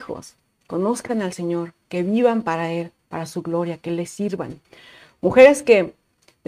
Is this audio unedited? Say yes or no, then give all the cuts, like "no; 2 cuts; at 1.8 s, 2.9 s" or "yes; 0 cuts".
yes; 0 cuts